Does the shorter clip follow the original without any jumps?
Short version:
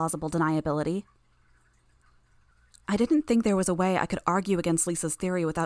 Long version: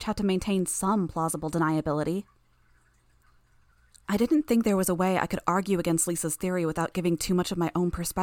yes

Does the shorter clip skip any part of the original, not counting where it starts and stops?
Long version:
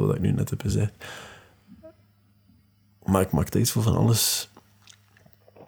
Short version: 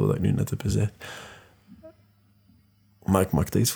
no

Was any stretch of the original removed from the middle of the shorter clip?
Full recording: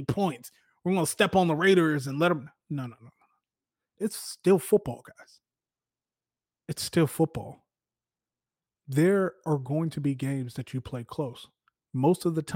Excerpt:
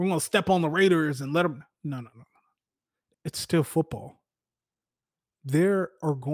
yes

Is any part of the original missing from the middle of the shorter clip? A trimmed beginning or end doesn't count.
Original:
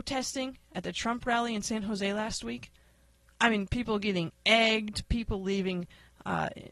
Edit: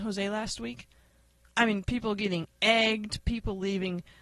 no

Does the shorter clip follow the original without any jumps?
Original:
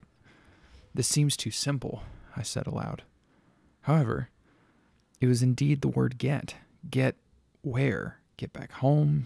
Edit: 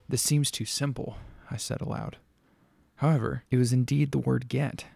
no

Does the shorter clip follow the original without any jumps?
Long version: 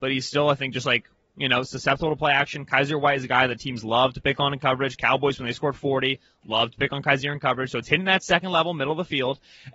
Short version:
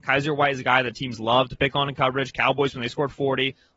yes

